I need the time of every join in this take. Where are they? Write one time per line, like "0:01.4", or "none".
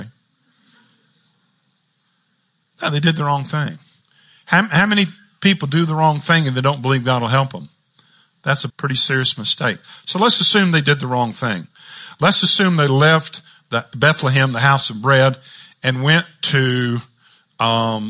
0:08.7